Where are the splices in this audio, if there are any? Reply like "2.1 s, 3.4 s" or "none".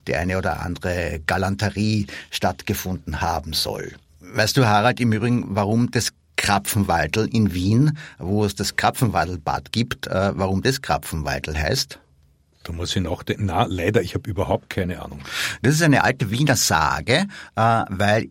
none